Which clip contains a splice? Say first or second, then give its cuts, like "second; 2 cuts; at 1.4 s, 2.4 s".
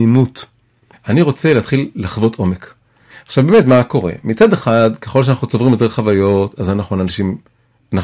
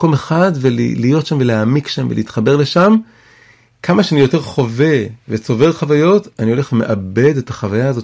first; 2 cuts; at 0.9 s, 3.1 s